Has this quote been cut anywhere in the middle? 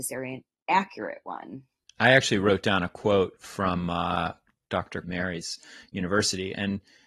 yes; 1 cut; at 5.0 s

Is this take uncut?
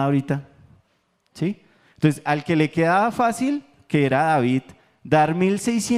yes; 0 cuts

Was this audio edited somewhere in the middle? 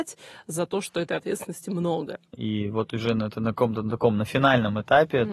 yes; 1 cut; at 2.3 s

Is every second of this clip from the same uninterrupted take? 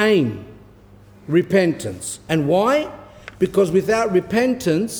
yes; 0 cuts

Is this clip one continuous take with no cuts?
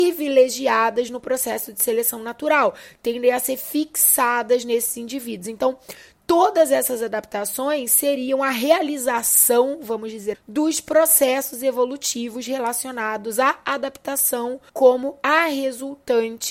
no; 2 cuts; at 10.3 s, 14.7 s

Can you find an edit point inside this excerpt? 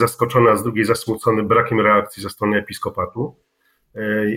no; 0 cuts

